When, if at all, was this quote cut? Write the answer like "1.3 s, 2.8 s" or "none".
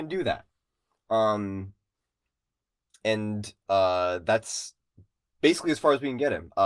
none